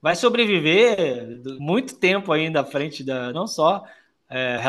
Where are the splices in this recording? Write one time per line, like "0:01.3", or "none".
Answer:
0:01.6
0:03.3